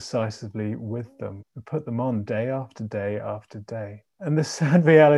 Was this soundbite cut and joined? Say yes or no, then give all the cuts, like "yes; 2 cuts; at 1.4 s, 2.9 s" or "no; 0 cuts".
yes; 2 cuts; at 1.4 s, 4.1 s